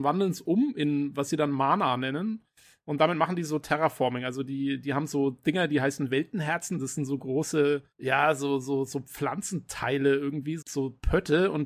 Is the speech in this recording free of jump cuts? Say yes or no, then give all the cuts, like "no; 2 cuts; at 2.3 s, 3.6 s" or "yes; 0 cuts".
no; 2 cuts; at 7.9 s, 10.6 s